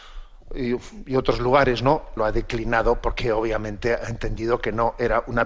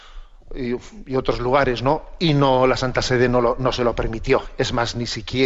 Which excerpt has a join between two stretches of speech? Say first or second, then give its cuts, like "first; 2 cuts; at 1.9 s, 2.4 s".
first; 1 cut; at 2.2 s